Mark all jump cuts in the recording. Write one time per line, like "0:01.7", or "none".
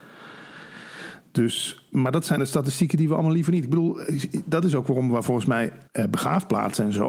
0:05.9

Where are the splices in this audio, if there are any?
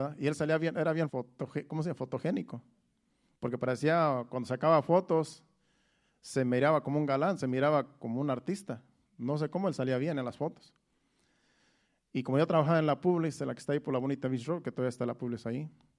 0:01.1

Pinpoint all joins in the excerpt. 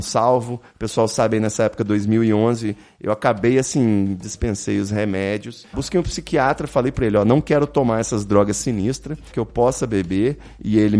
0:04.2
0:05.7
0:09.3

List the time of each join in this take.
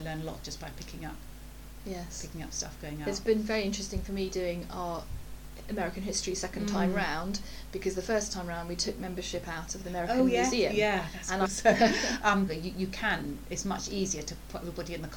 0:11.5
0:12.5

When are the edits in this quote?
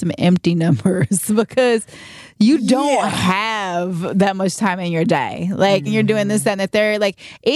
0:05.9

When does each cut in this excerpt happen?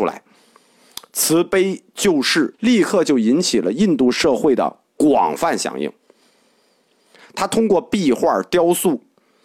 0:02.5
0:07.2

